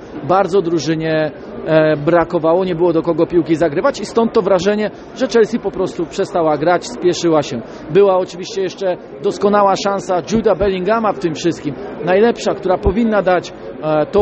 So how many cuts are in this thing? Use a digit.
0